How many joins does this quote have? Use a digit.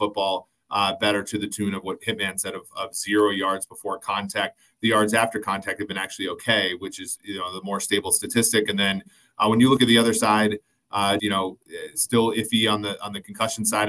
1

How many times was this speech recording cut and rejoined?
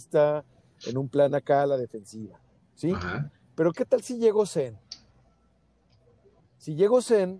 0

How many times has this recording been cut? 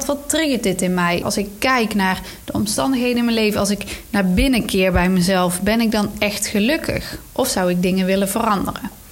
1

